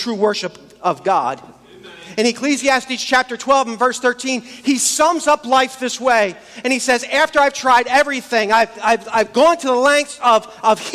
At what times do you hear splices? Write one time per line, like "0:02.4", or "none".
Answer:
0:08.7